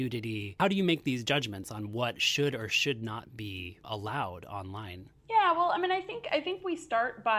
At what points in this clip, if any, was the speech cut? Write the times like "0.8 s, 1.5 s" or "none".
5.2 s